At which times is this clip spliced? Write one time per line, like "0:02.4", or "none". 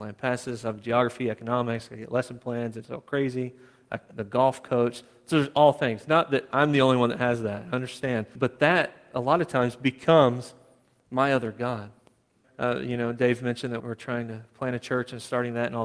0:08.3
0:12.4
0:13.8